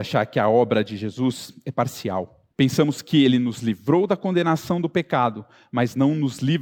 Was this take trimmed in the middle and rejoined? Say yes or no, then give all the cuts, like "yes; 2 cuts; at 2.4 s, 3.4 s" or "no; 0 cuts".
yes; 1 cut; at 2.5 s